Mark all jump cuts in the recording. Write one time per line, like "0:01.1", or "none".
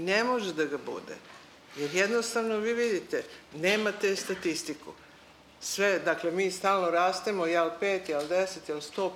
none